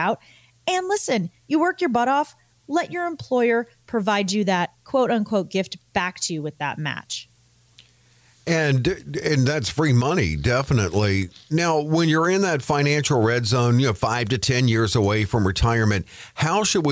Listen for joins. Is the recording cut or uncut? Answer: uncut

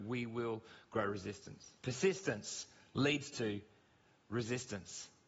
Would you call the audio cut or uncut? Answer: cut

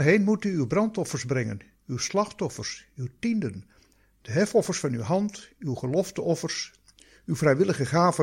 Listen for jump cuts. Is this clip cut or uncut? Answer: uncut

